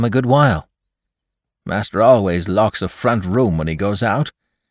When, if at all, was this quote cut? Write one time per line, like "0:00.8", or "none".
0:01.6